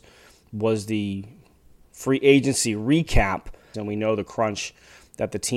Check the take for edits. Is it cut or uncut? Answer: cut